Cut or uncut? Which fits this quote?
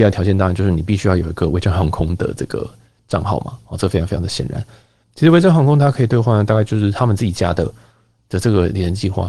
cut